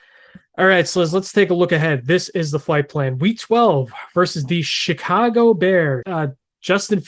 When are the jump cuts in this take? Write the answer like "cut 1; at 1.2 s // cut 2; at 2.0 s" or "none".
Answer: cut 1; at 6.0 s